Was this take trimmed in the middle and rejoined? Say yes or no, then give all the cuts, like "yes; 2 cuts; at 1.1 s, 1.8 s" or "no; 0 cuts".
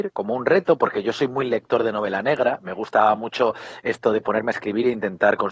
no; 0 cuts